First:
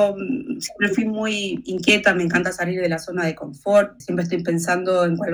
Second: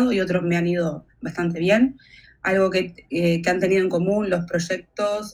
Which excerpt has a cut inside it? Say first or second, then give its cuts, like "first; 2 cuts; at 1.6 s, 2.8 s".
first; 1 cut; at 4.0 s